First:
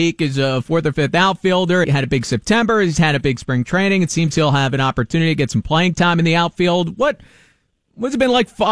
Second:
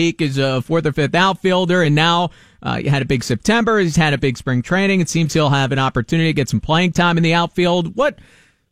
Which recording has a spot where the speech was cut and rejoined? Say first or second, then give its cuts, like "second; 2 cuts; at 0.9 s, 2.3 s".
first; 1 cut; at 1.8 s